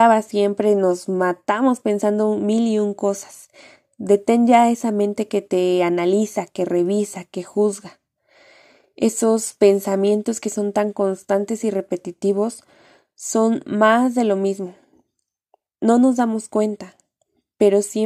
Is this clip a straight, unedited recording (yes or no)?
yes